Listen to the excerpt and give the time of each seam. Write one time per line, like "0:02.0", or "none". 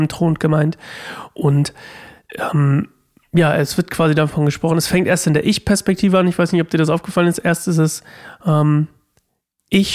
none